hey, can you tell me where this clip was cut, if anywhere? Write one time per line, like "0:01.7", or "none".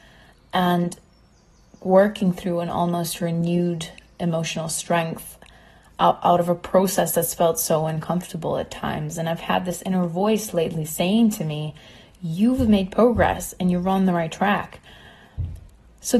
none